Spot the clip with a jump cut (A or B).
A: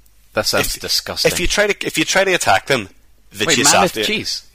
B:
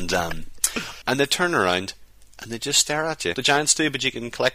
B